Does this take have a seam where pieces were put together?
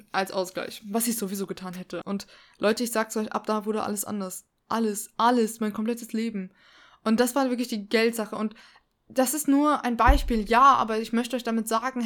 yes; 1 cut; at 2.0 s

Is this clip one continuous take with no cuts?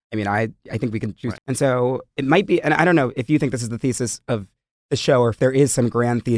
no; 1 cut; at 1.4 s

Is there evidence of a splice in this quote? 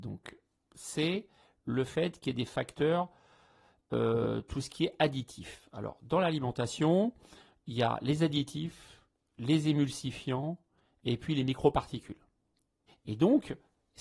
yes; 1 cut; at 12.9 s

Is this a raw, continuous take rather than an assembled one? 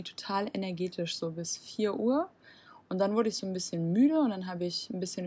yes; 0 cuts

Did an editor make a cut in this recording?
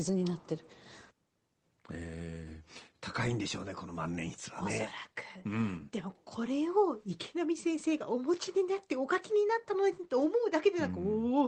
no; 0 cuts

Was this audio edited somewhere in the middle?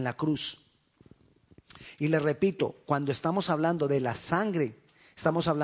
yes; 1 cut; at 1.9 s

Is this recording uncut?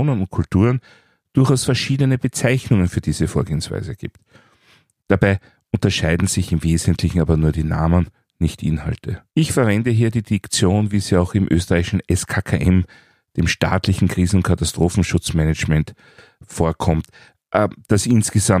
no; 1 cut; at 9.3 s

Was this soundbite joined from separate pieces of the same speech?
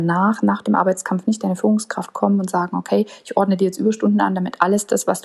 no; 0 cuts

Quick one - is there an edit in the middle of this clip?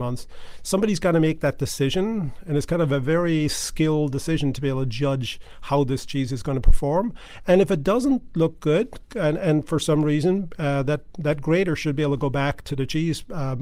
no; 0 cuts

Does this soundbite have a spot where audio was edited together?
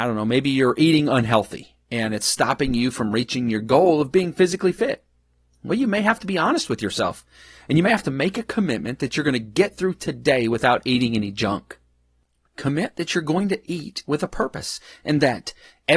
no; 0 cuts

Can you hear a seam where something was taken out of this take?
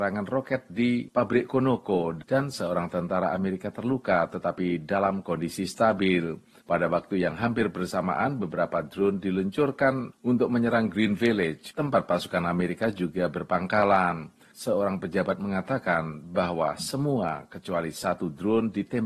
no; 0 cuts

